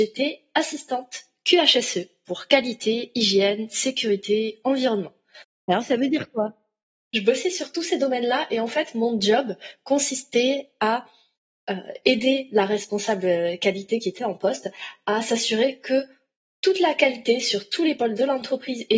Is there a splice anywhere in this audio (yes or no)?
no